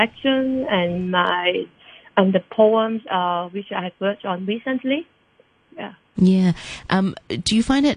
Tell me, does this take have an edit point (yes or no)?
no